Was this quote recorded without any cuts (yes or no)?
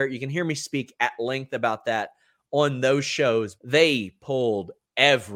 no